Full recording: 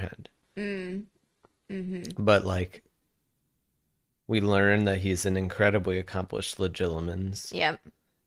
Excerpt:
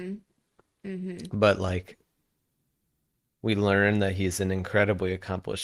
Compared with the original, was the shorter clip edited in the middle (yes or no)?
no